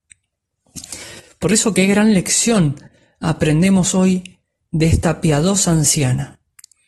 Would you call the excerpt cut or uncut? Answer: uncut